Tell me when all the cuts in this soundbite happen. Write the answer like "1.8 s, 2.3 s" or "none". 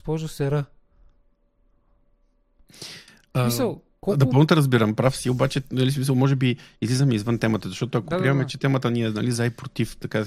none